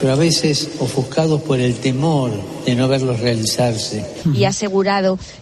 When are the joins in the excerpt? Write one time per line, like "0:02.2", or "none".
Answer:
0:04.2